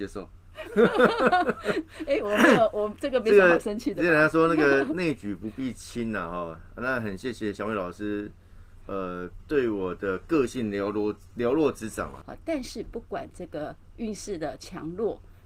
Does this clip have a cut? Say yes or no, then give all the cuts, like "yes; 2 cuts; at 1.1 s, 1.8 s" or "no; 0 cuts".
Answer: yes; 1 cut; at 12.2 s